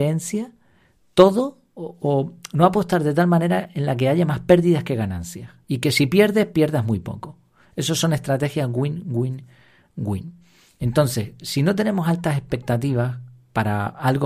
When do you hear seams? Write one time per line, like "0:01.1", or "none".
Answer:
0:05.6

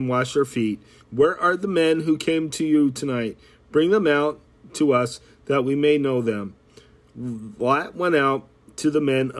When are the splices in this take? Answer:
0:01.0

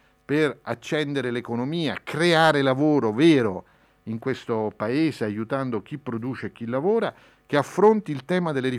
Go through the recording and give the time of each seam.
none

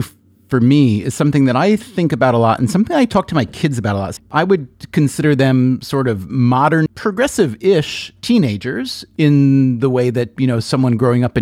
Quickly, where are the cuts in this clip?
0:04.2
0:06.9

